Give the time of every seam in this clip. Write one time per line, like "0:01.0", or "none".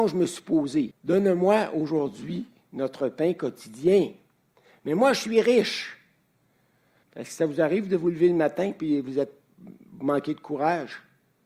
0:00.9
0:07.0